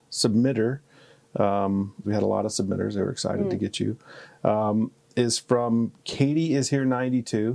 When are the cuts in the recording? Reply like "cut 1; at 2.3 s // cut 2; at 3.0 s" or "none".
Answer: cut 1; at 2.0 s